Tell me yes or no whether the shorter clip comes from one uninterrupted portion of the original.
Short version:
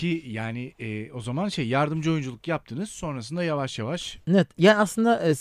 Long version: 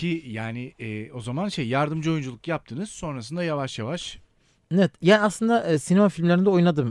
no